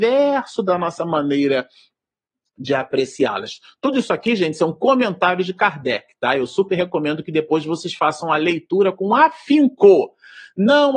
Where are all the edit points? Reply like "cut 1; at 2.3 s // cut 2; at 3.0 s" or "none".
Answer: none